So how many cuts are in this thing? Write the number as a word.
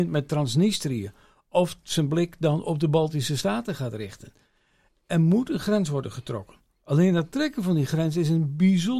zero